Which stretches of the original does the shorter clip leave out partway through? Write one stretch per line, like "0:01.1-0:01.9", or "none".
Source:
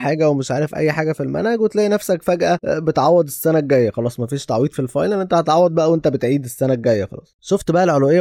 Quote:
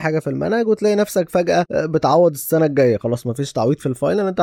none